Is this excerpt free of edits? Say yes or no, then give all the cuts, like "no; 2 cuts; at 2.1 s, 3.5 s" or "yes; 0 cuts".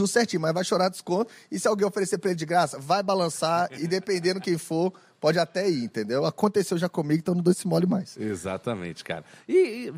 yes; 0 cuts